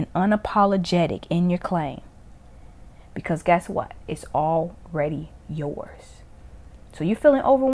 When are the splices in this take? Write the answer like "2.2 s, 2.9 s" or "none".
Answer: none